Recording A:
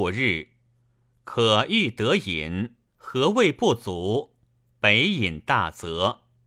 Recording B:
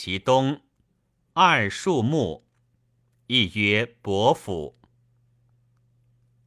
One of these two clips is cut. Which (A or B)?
A